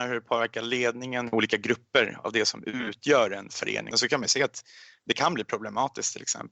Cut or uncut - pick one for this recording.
cut